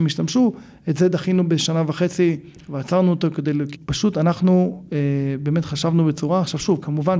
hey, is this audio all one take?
no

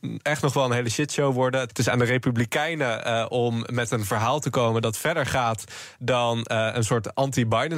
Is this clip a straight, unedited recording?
no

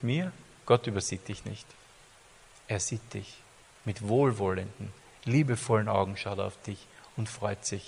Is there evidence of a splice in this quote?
no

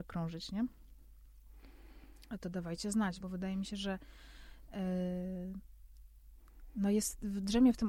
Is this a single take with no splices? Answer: no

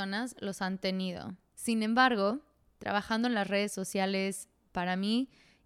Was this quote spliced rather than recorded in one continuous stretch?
yes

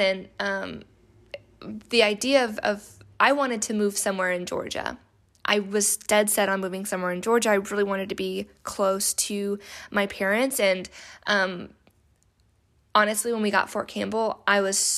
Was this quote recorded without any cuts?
yes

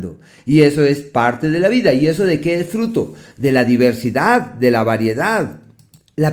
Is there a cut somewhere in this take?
no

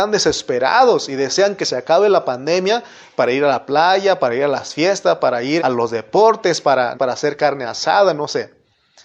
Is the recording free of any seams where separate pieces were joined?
no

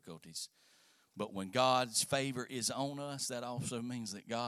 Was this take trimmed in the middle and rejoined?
no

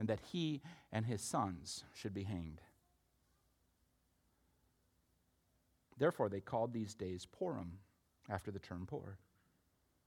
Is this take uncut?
yes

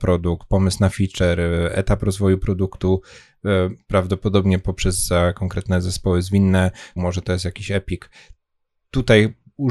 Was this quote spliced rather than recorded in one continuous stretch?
yes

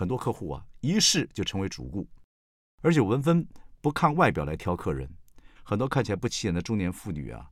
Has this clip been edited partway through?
yes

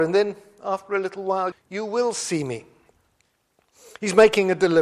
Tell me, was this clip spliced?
yes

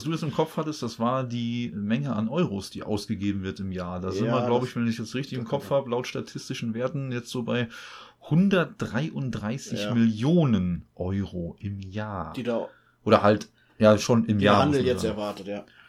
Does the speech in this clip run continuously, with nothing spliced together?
yes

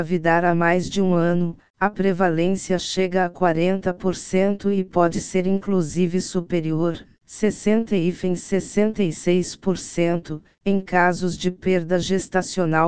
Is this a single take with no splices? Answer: yes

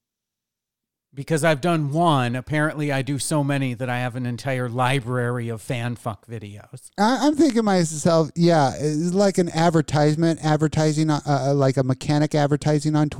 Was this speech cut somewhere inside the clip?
no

